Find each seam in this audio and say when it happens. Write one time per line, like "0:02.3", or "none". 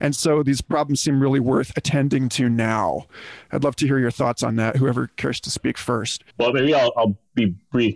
0:06.3